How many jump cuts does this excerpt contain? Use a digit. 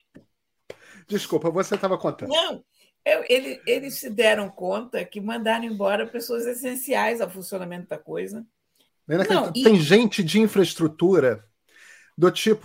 2